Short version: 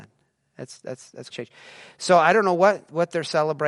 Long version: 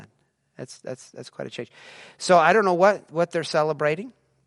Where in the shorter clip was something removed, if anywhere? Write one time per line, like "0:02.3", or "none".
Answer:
0:01.3